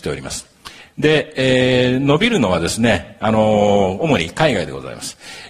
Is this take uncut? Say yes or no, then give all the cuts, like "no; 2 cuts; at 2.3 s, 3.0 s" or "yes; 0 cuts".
yes; 0 cuts